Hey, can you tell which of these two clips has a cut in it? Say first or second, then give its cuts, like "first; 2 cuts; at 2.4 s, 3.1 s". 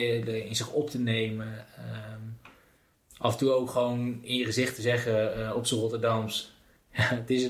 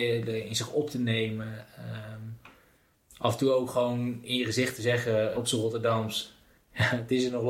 second; 1 cut; at 5.3 s